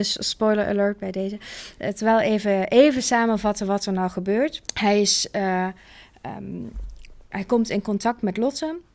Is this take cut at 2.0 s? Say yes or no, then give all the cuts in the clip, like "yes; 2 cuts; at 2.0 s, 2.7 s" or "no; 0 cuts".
no; 2 cuts; at 4.7 s, 7.3 s